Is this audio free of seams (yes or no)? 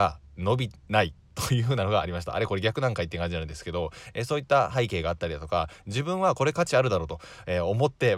yes